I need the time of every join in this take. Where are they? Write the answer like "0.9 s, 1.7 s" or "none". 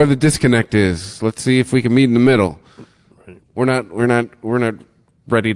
none

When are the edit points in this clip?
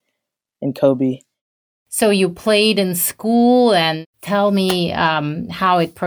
none

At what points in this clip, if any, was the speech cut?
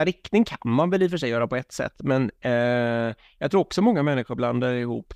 none

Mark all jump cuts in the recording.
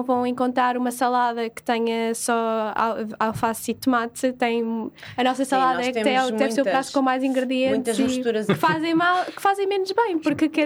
8.5 s

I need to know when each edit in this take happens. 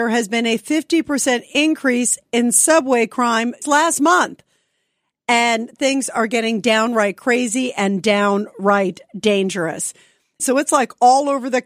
3.6 s, 10.4 s

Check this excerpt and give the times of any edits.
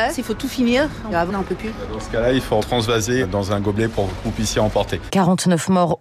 1.3 s, 5.1 s

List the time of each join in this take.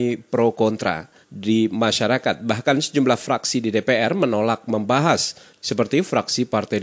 1.2 s

